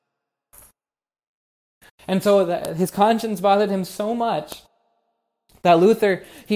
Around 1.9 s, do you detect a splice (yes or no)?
yes